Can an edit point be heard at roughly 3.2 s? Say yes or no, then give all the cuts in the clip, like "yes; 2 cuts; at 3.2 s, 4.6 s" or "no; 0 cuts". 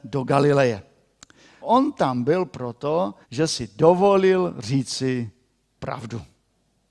yes; 2 cuts; at 1.6 s, 3.2 s